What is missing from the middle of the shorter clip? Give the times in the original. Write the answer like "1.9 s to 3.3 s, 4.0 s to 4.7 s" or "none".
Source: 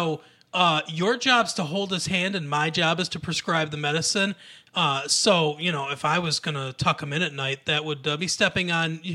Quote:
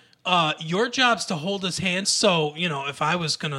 2.3 s to 5.1 s